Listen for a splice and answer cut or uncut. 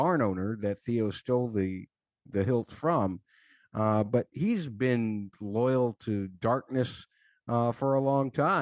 uncut